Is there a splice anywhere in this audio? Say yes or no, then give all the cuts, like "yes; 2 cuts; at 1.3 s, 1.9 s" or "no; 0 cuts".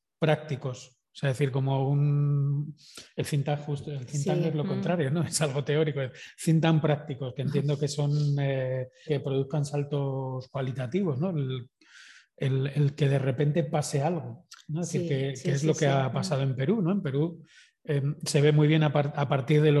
yes; 1 cut; at 9.1 s